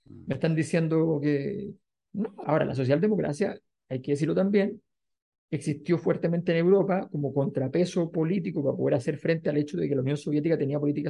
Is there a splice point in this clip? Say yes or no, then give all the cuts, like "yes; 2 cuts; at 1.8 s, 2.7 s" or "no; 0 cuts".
yes; 1 cut; at 2.4 s